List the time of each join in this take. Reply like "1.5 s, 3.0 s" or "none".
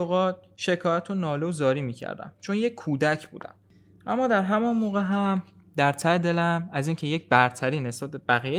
none